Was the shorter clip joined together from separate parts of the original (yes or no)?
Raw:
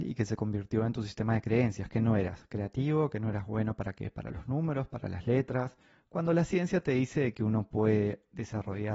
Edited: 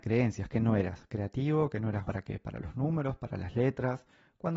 yes